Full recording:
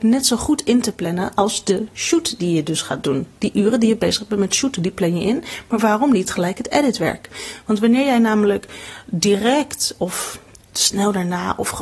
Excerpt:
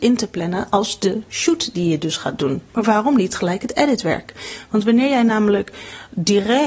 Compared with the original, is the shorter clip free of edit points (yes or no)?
no